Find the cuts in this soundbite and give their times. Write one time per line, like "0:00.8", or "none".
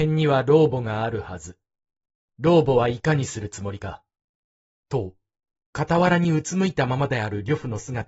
0:04.8